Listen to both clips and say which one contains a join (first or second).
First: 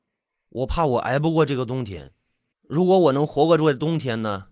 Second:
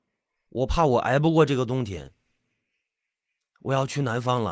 first